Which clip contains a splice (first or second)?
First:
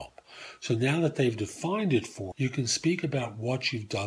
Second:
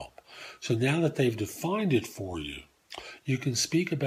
first